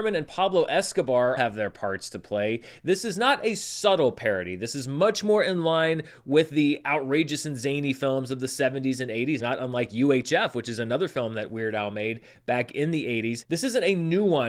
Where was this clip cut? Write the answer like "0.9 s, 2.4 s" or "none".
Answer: 1.4 s, 9.4 s